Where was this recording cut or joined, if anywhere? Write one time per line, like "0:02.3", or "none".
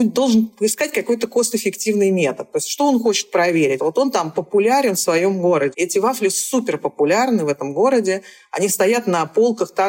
0:03.8
0:05.7